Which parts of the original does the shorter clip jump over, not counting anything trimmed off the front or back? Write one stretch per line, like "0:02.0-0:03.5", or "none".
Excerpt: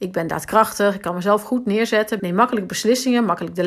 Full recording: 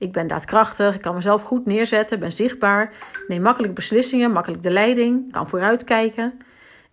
0:02.2-0:03.3